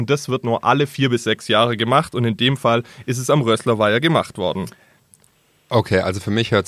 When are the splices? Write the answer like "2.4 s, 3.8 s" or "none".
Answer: none